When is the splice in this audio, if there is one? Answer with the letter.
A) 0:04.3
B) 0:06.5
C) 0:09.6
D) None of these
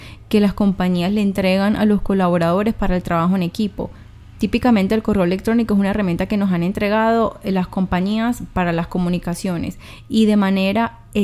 A